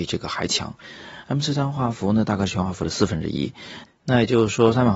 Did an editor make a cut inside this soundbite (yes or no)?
yes